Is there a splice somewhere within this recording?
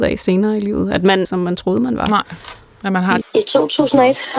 yes; 2 cuts; at 1.2 s, 3.2 s

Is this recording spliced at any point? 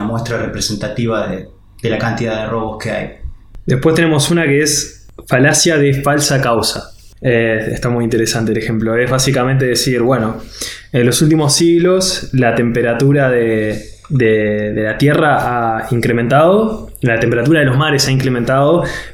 no; 0 cuts

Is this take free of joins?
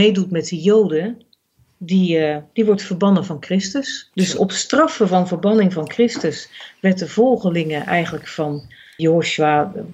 no; 1 cut; at 9.0 s

